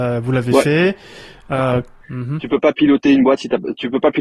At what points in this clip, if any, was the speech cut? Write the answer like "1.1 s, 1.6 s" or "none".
2.0 s